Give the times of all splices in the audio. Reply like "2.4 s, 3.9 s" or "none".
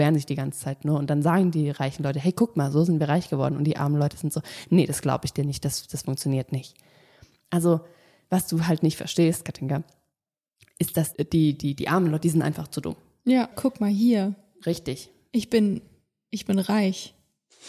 13.5 s